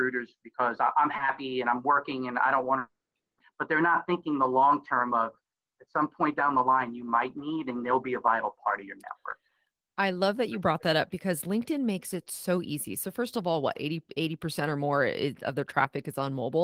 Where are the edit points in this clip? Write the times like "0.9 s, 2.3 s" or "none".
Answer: none